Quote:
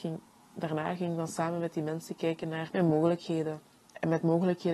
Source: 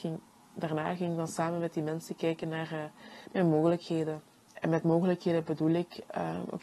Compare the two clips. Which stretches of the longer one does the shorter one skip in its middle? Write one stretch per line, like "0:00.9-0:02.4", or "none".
0:02.7-0:03.3